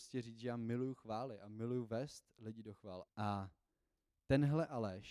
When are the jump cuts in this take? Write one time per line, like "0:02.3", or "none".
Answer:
0:03.1

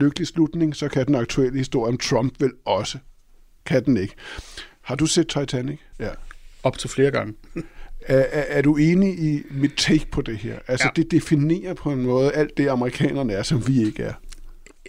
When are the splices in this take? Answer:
0:05.9

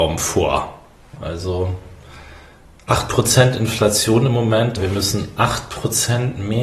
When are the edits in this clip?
0:01.2
0:04.8

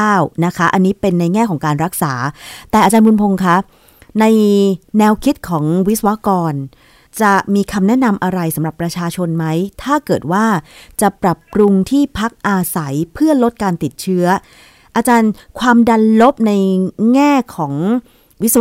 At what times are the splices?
0:11.2

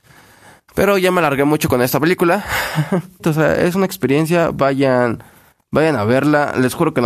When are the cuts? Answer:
0:03.2

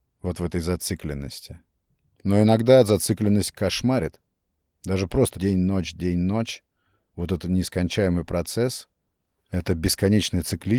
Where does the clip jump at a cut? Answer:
0:05.3

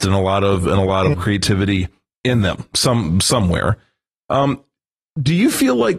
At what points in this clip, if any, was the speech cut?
0:01.1

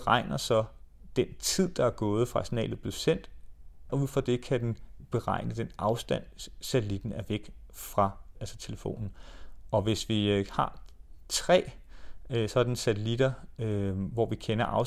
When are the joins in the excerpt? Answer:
0:03.9

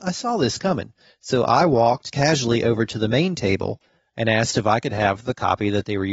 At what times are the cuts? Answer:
none

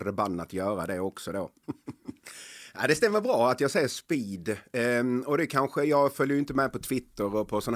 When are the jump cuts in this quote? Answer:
0:01.6

